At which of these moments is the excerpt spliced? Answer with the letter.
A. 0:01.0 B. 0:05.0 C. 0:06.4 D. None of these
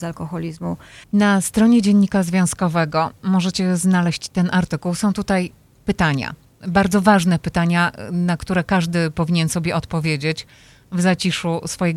A